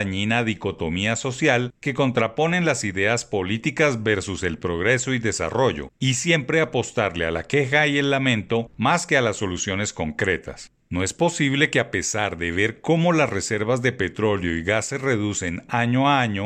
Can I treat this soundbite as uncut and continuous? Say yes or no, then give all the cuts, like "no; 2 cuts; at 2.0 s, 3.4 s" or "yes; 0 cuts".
no; 1 cut; at 10.8 s